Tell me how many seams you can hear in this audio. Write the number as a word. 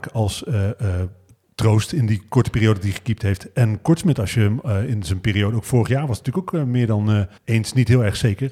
one